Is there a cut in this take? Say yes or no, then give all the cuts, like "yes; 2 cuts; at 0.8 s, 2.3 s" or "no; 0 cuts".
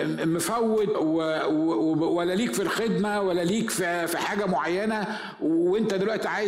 yes; 1 cut; at 0.9 s